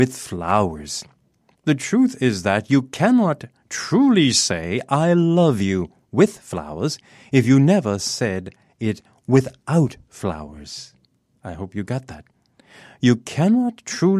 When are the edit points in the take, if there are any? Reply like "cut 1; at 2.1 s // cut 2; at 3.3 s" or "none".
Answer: cut 1; at 1.5 s